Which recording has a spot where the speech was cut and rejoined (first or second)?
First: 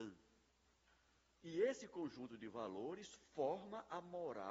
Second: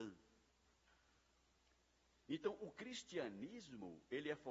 first